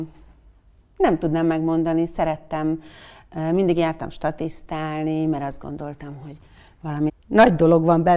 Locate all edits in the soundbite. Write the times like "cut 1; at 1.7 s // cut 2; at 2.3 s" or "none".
cut 1; at 7.1 s